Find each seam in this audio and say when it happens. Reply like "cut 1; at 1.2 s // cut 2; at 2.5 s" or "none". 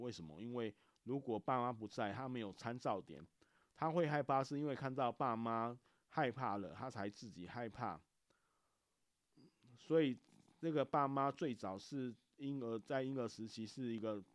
none